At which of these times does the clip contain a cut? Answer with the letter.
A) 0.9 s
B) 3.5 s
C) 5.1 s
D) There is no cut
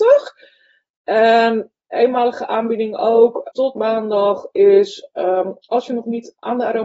B